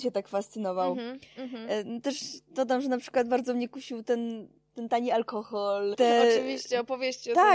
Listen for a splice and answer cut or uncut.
cut